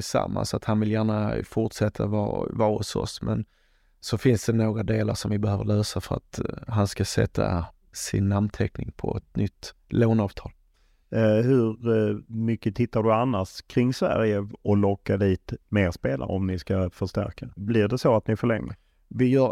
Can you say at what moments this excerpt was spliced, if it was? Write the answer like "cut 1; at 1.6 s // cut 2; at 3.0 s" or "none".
cut 1; at 14.6 s // cut 2; at 17.6 s